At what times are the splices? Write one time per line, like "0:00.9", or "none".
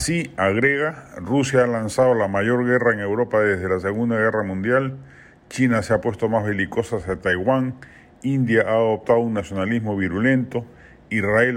none